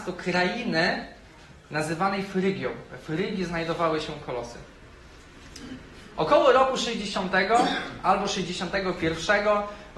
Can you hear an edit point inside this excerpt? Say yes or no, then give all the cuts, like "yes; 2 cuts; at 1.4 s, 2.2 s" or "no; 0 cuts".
no; 0 cuts